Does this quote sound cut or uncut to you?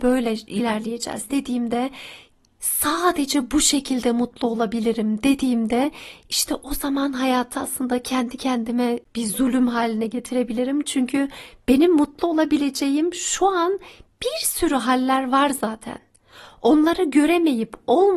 uncut